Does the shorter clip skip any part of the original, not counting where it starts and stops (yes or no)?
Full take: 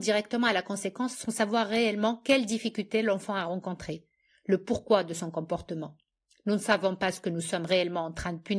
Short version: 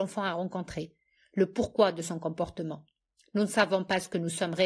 no